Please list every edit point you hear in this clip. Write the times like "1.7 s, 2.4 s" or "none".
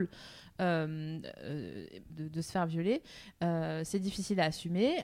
2.1 s